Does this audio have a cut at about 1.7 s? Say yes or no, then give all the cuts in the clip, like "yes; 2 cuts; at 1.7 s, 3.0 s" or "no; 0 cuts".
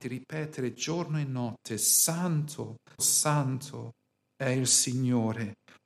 no; 1 cut; at 3.0 s